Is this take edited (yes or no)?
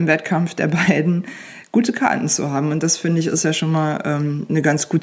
no